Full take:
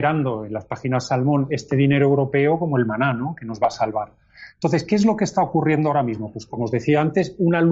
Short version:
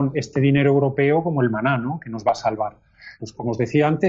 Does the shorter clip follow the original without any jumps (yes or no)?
no